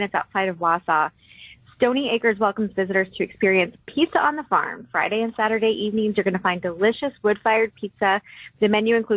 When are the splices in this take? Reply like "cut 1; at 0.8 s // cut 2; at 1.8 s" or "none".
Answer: none